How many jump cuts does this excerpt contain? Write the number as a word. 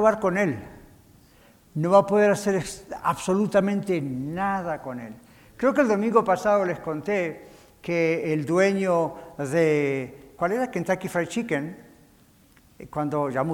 one